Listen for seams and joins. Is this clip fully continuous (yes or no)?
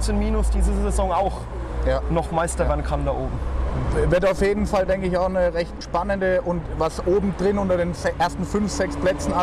no